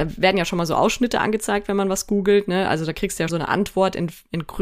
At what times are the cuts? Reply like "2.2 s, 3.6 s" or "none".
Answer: 3.3 s